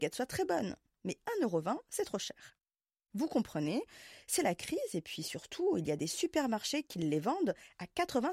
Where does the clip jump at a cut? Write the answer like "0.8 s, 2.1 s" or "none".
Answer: none